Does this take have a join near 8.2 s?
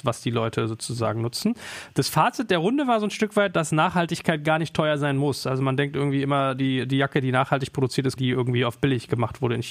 yes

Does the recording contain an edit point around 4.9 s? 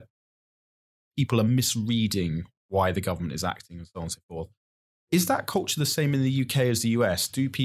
no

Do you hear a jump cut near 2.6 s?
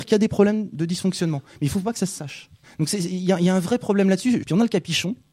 yes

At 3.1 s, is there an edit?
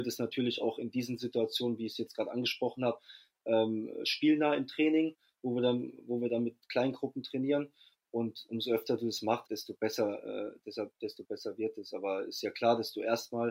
no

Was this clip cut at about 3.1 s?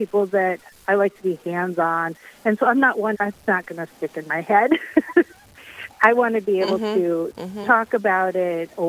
yes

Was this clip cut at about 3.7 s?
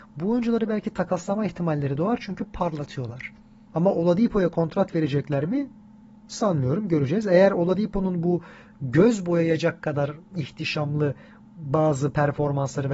yes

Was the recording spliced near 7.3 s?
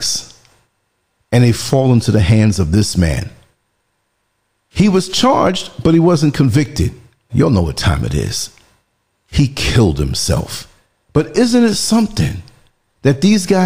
yes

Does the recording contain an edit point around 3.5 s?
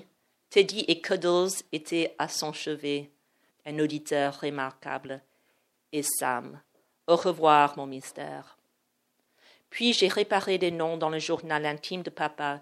yes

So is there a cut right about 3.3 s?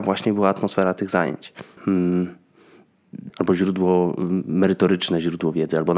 yes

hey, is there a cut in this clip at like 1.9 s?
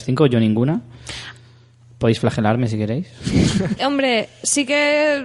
no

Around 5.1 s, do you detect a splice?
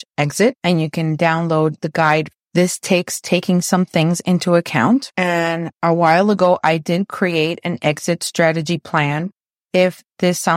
no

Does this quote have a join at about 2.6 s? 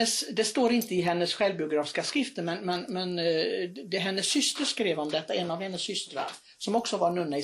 no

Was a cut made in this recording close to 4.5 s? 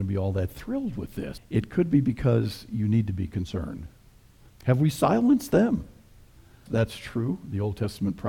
yes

